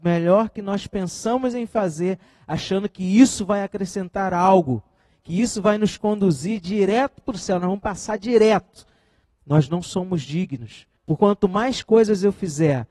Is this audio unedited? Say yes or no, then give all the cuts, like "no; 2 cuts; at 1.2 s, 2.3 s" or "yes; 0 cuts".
no; 2 cuts; at 9.2 s, 11.0 s